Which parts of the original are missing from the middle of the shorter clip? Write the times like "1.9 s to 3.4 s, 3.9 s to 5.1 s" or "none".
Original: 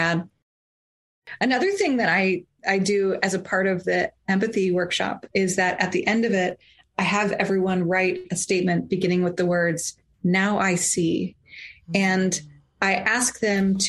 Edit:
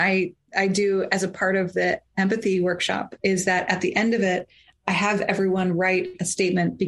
none